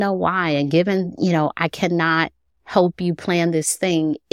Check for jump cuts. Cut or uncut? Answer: uncut